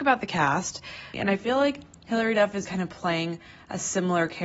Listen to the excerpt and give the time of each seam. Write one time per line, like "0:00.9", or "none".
0:01.1
0:02.6